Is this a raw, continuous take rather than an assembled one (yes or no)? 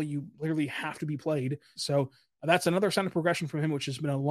no